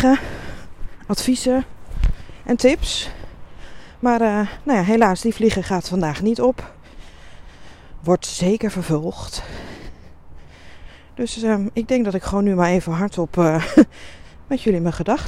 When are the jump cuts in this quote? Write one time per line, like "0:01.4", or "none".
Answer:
none

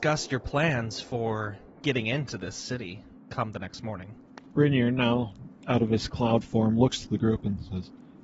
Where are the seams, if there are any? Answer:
none

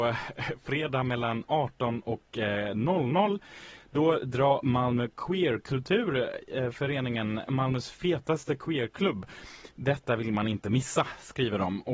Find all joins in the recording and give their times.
0:07.5

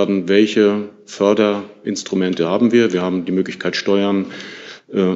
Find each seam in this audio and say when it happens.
none

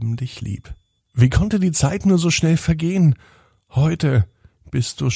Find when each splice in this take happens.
0:01.0

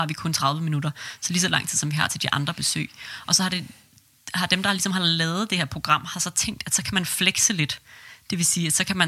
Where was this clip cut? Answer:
none

